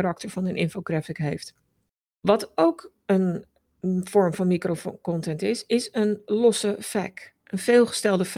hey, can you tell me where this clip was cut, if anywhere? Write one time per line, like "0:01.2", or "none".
none